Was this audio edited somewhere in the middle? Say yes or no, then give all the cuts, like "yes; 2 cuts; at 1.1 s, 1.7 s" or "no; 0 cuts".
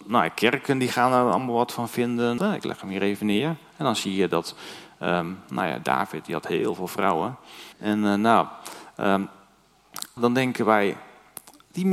yes; 3 cuts; at 2.4 s, 7.7 s, 10.2 s